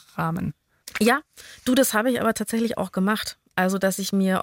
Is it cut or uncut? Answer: uncut